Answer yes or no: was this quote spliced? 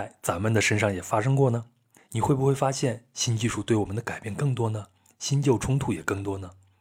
yes